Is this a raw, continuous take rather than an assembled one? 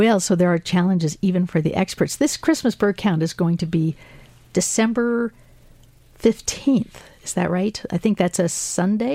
yes; 0 cuts

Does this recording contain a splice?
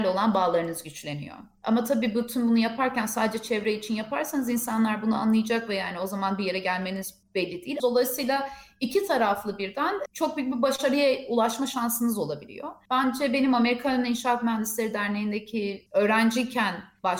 yes; 2 cuts; at 1.5 s, 7.8 s

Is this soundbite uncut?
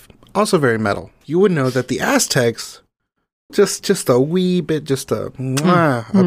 no; 2 cuts; at 1.2 s, 3.5 s

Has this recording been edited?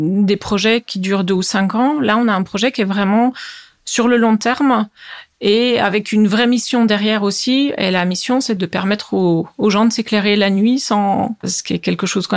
yes; 2 cuts; at 8.6 s, 11.4 s

